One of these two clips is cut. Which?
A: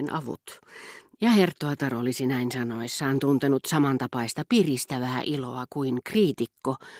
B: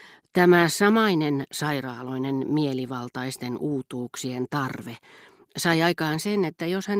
A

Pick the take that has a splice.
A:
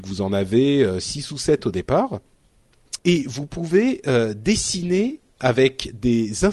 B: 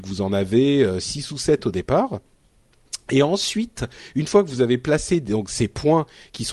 A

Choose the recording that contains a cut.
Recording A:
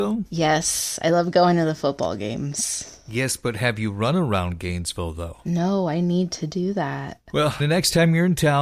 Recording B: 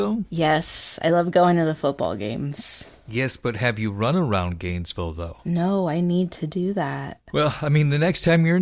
A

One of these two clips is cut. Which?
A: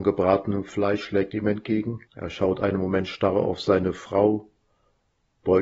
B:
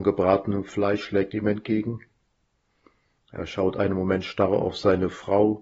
A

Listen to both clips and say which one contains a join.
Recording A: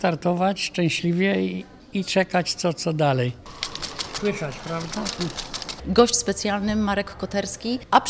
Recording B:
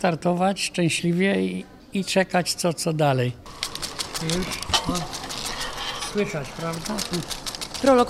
A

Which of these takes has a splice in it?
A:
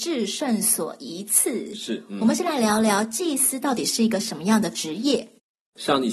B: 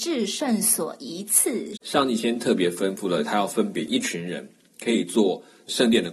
B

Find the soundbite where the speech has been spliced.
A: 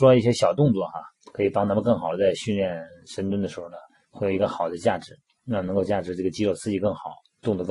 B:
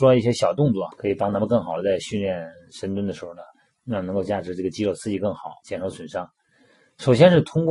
B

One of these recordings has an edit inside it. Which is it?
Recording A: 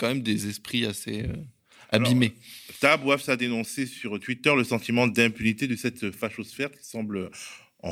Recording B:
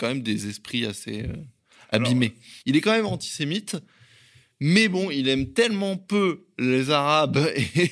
B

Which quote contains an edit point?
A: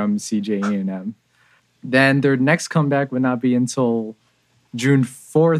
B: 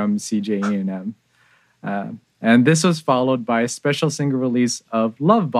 A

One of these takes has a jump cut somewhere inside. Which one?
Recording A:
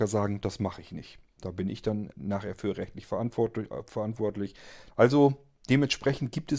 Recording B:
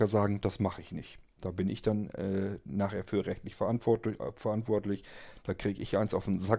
A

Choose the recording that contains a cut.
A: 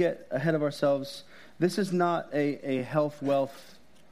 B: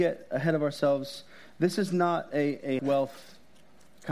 B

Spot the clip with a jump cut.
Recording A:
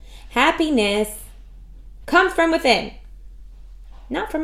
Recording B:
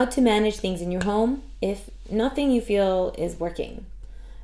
A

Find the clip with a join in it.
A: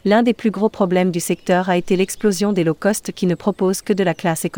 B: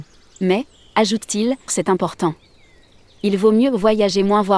B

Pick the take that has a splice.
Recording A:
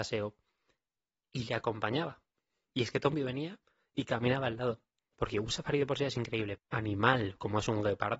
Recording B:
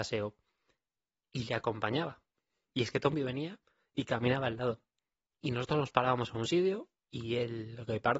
A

